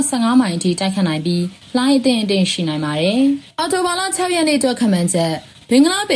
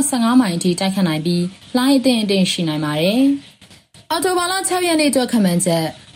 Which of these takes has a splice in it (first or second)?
first